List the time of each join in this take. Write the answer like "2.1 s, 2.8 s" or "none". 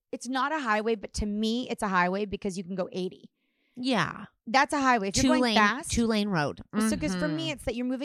none